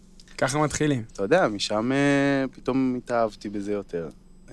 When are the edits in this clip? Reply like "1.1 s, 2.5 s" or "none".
1.1 s